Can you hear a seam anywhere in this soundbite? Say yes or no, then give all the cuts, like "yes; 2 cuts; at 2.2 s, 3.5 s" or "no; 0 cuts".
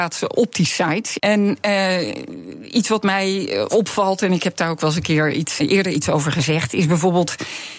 yes; 2 cuts; at 1.2 s, 5.6 s